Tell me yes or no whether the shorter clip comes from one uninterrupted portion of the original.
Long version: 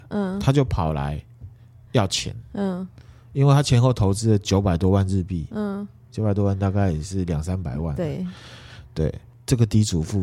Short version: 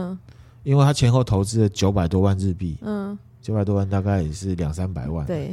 yes